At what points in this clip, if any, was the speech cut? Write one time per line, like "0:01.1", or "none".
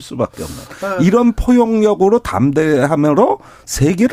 none